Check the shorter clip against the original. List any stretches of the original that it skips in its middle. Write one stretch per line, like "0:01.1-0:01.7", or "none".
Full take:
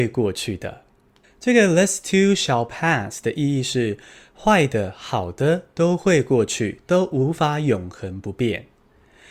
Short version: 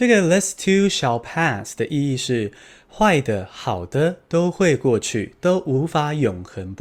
none

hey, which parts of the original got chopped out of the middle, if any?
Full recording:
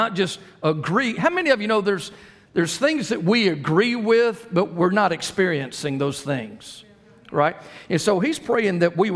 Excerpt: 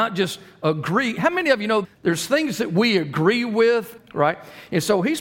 0:01.8-0:02.4
0:04.5-0:07.2

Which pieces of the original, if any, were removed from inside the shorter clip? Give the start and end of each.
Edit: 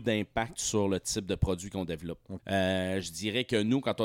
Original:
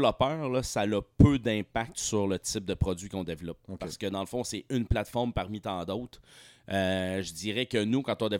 0:03.8-0:06.6

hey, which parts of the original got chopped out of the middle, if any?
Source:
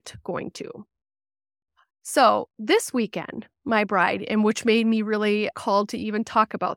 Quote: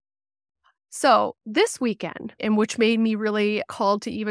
0:03.5-0:04.3

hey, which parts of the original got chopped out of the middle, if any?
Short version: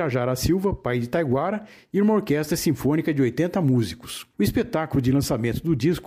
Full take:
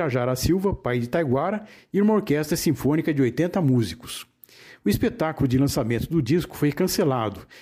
0:04.3-0:04.8

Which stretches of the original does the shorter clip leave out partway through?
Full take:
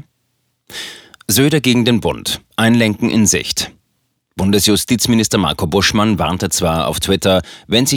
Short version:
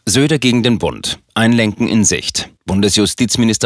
0:03.8-0:04.3

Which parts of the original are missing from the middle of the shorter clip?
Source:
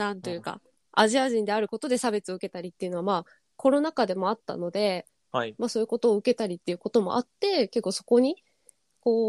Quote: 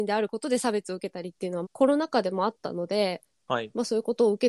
0:03.0-0:03.5

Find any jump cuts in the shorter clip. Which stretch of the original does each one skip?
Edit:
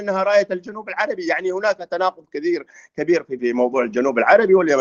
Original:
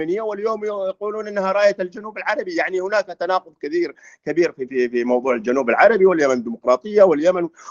0:04.7-0:04.9

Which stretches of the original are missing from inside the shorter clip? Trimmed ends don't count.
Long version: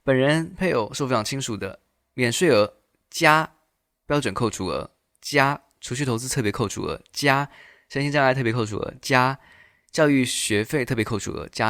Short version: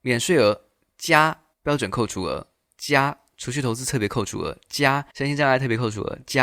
0:03.7-0:04.0
0:07.5-0:07.9

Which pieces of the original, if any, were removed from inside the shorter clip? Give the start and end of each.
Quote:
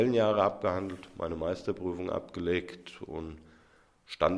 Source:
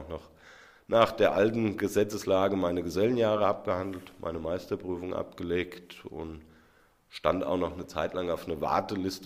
none

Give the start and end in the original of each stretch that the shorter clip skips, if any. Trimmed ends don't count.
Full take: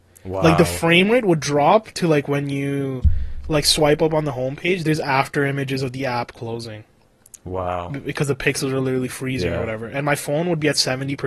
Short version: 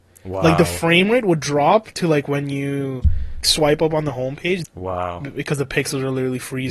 0:03.4-0:03.6
0:04.8-0:07.3

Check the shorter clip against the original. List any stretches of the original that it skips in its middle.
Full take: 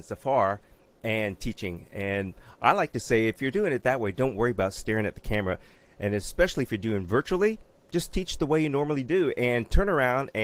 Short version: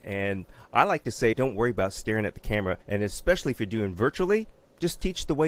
0:03.2-0:04.1
0:05.6-0:05.9

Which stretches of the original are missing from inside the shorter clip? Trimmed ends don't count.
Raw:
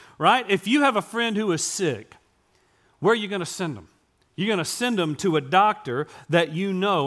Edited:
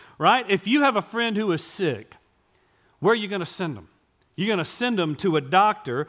none

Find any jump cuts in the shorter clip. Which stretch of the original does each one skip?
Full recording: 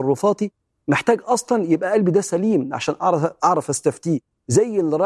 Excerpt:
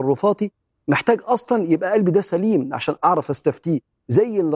0:03.0-0:03.4

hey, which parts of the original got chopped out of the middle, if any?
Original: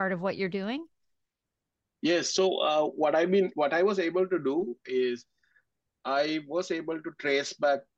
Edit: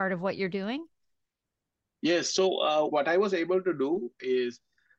0:02.9-0:03.5

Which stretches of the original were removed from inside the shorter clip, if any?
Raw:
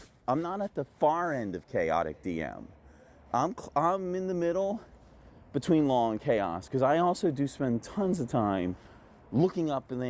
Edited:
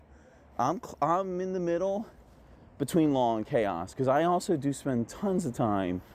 none

